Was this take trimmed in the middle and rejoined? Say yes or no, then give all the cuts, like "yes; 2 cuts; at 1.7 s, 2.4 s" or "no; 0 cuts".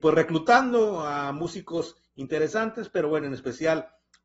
no; 0 cuts